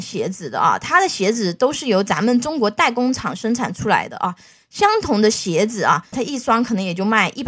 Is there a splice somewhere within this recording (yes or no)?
yes